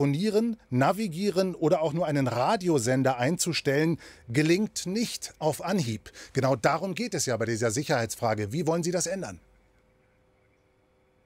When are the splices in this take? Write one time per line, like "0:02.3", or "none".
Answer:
none